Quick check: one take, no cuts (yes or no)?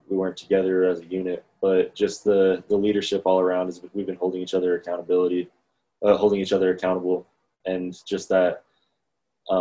yes